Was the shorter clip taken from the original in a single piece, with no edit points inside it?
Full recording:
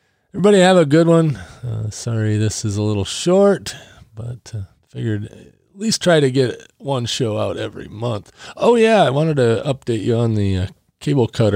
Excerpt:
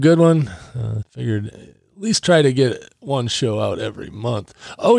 no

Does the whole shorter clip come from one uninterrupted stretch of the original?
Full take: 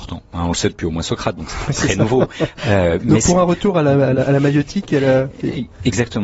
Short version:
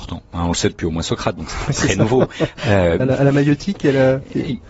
no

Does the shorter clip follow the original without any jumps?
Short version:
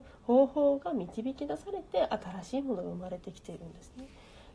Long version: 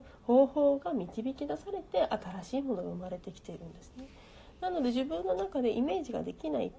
yes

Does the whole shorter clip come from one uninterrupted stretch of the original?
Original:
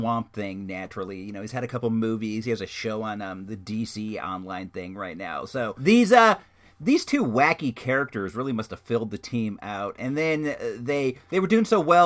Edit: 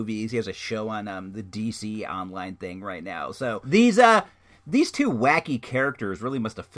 yes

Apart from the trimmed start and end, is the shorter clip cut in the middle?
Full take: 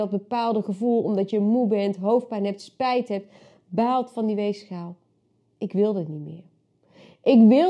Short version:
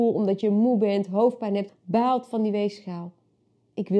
yes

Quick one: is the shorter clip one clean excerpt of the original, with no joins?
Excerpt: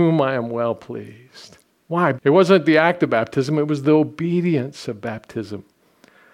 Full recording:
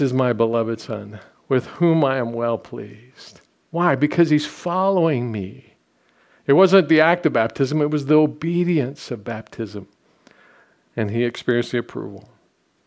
no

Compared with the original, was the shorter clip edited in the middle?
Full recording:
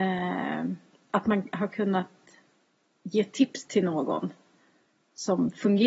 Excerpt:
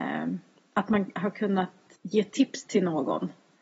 yes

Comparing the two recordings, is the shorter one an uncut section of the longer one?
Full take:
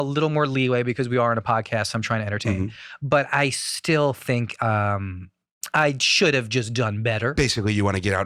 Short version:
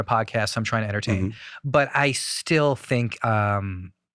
yes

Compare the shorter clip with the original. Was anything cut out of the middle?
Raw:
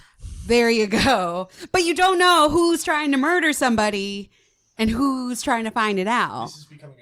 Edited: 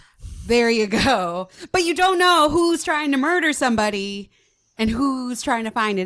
no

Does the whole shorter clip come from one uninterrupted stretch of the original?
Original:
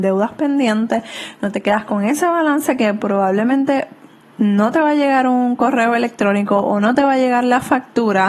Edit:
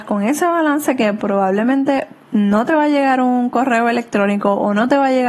no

